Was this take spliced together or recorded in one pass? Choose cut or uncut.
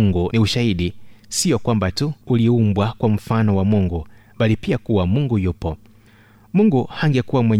cut